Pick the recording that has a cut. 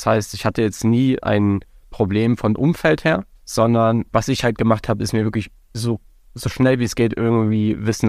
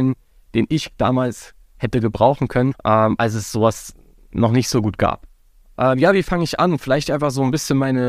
first; 1 cut; at 1.2 s

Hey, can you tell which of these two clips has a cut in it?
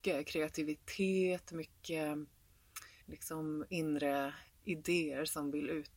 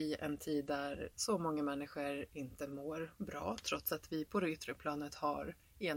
first; 2 cuts; at 3.0 s, 4.5 s

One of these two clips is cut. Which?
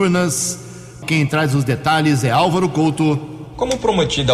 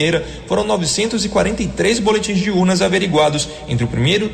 first; 1 cut; at 1.0 s

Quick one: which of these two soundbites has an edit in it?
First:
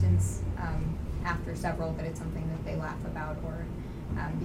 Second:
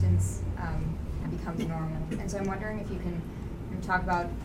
second; 1 cut; at 1.2 s

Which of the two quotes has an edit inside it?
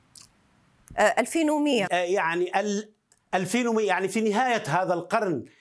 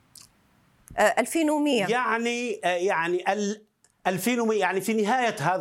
first; 1 cut; at 1.9 s

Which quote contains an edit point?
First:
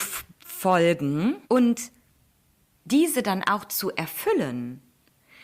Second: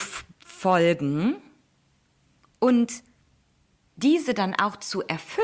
first; 1 cut; at 1.4 s

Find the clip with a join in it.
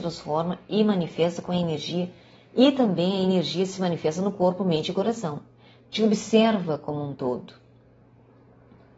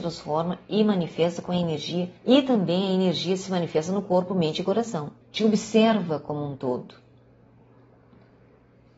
second; 2 cuts; at 2.2 s, 5.2 s

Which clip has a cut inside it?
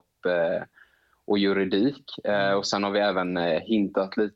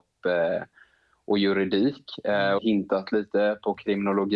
second; 1 cut; at 2.6 s

